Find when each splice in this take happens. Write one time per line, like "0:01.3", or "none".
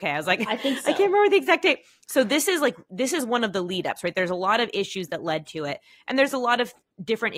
none

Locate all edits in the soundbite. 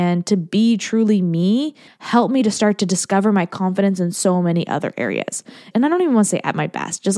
0:01.9
0:05.7

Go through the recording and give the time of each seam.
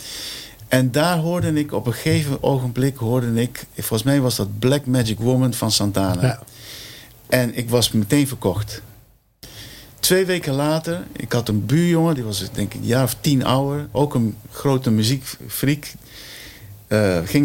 none

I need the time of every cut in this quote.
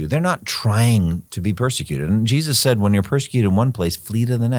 0:01.3

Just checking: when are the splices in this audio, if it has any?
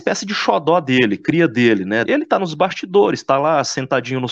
0:02.1

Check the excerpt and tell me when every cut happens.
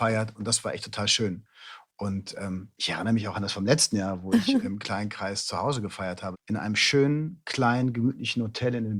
0:06.3

